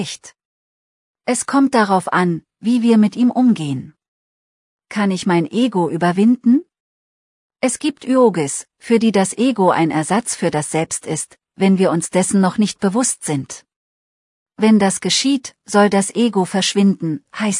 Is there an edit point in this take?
no; 0 cuts

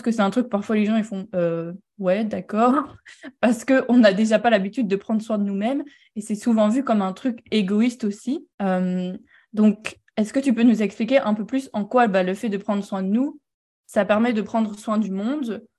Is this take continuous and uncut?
no; 1 cut; at 8.5 s

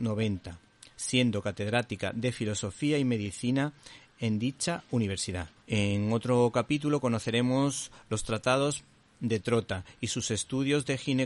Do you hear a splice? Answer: yes; 1 cut; at 5.6 s

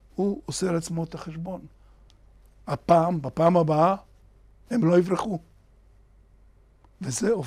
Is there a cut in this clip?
no; 0 cuts

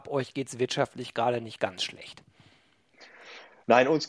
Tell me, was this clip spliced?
no; 0 cuts

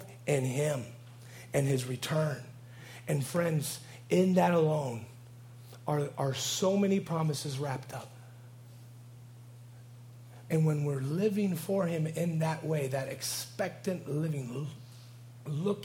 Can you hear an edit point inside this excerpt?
yes; 1 cut; at 10.5 s

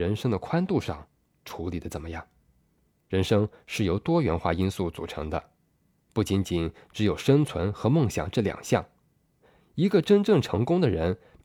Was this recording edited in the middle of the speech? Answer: no; 0 cuts

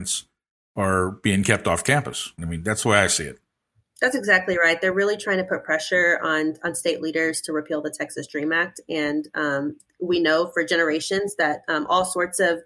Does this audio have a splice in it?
yes; 1 cut; at 2.4 s

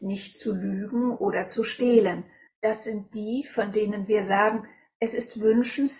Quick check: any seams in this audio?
yes; 1 cut; at 2.4 s

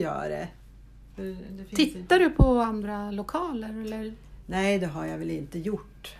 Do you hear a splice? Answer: no; 0 cuts

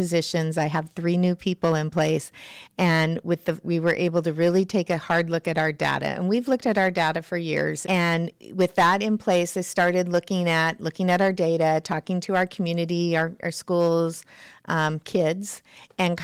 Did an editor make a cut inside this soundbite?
yes; 2 cuts; at 3.6 s, 7.8 s

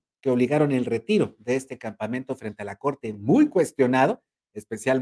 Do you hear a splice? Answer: no; 0 cuts

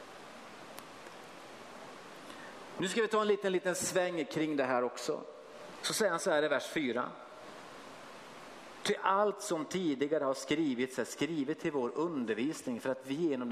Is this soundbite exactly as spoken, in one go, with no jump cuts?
no; 1 cut; at 5.8 s

